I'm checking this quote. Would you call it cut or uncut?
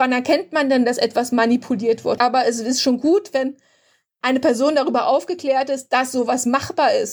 cut